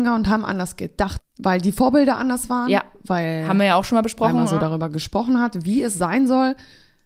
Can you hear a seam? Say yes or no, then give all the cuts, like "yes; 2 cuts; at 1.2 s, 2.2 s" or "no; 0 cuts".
yes; 1 cut; at 1.2 s